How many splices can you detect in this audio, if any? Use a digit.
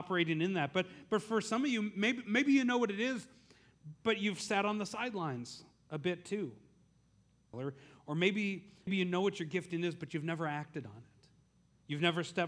2